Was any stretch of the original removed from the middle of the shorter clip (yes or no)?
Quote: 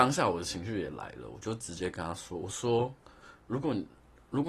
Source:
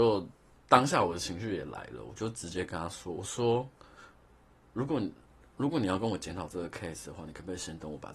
yes